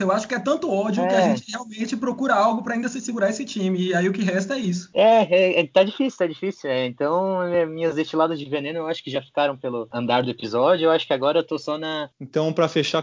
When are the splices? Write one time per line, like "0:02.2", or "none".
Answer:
0:12.1